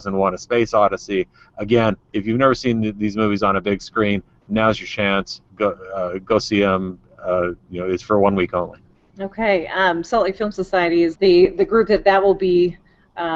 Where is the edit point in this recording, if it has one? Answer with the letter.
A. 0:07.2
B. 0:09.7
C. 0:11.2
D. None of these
C